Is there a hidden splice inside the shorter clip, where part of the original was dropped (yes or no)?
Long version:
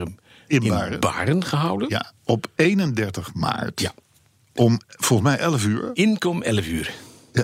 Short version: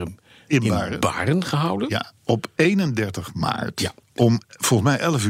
yes